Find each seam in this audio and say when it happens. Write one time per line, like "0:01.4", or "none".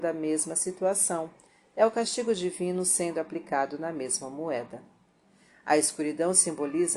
none